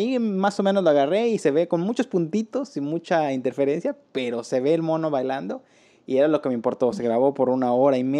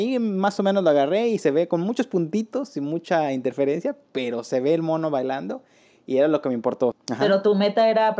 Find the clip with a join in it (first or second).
second